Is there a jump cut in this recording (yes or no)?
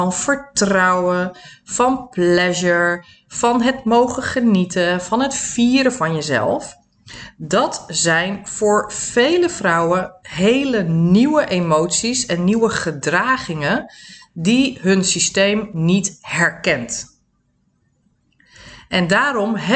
no